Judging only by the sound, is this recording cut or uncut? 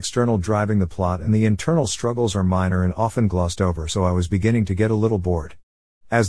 uncut